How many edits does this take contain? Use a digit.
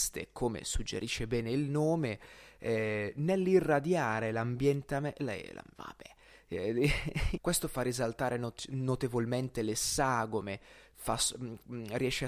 2